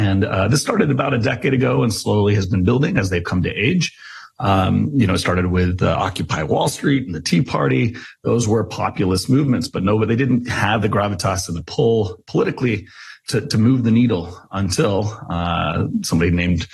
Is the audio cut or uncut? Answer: uncut